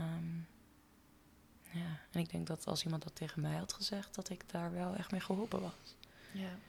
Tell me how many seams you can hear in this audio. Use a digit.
0